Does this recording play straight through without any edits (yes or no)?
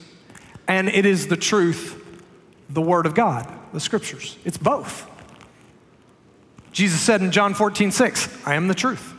yes